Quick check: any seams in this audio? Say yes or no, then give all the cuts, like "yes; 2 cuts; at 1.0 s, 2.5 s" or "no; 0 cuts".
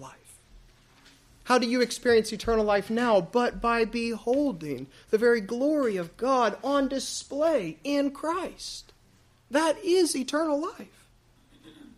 no; 0 cuts